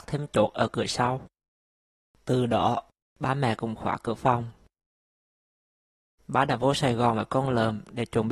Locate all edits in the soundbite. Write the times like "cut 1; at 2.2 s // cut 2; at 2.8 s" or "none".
cut 1; at 3.0 s // cut 2; at 6.2 s